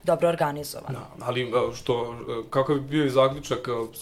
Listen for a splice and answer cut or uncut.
uncut